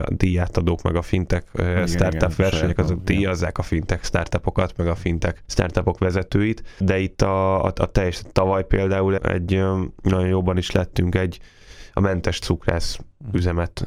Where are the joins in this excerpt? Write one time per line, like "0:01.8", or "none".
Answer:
0:09.2